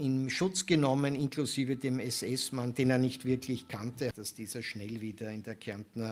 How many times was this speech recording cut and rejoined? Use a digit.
1